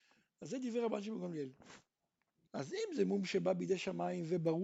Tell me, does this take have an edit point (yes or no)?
yes